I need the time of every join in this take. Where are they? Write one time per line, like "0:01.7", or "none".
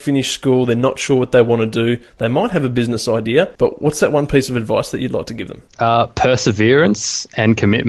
0:03.6
0:05.7